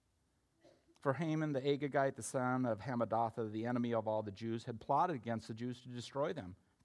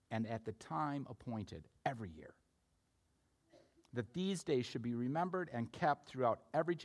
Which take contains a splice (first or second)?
first